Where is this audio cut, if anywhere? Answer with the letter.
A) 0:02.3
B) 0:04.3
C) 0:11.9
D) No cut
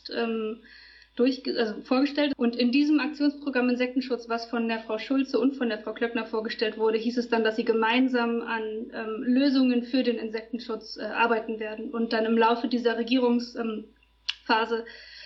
A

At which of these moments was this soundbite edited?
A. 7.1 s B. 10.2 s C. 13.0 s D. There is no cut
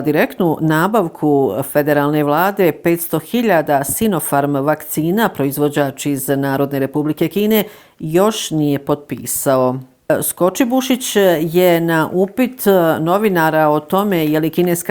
D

